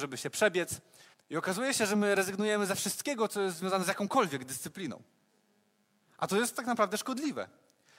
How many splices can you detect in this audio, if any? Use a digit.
1